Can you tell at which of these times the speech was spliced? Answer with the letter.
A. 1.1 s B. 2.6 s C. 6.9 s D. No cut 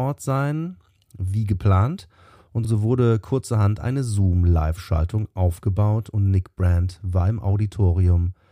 D